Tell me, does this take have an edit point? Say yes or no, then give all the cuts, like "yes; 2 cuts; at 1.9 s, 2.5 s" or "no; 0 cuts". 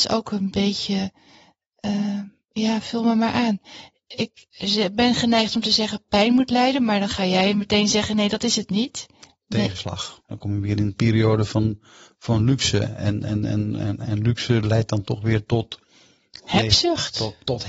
yes; 1 cut; at 10.2 s